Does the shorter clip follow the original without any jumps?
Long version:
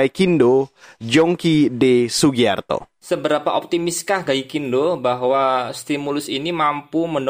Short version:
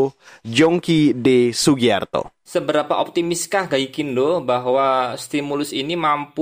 yes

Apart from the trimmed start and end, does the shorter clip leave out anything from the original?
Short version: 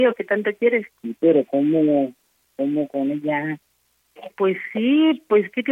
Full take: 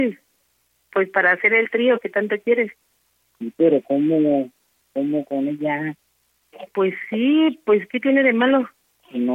yes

